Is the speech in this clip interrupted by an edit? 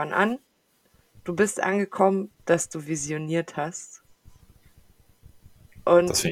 yes; 1 cut; at 2.4 s

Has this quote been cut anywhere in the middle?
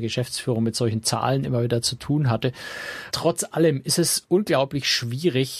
no; 0 cuts

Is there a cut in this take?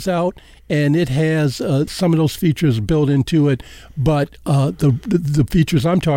yes; 1 cut; at 1.9 s

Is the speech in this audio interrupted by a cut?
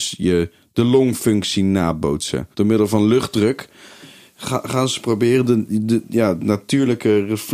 yes; 1 cut; at 2.5 s

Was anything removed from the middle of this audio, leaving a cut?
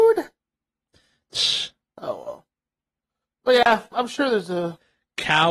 yes; 1 cut; at 3.9 s

